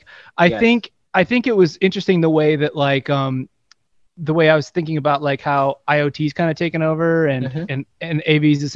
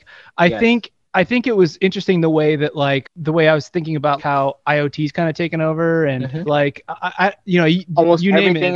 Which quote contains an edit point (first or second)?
second